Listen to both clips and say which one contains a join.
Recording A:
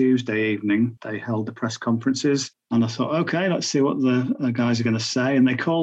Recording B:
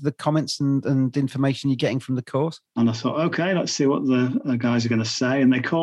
B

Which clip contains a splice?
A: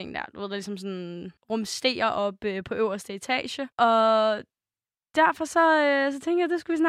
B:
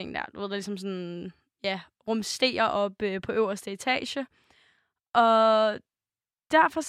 A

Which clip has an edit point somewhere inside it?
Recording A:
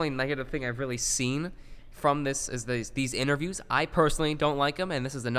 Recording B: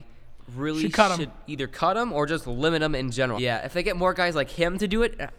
B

